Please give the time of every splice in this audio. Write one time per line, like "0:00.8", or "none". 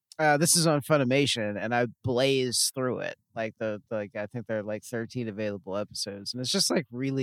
none